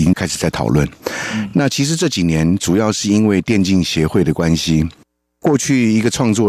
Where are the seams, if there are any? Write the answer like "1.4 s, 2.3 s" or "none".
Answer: none